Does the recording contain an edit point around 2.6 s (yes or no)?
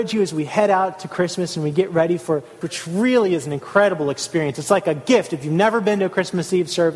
yes